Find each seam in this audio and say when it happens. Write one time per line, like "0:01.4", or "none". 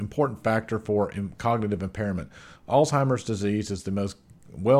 none